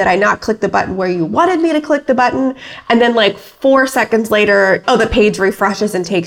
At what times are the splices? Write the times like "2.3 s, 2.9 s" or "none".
4.8 s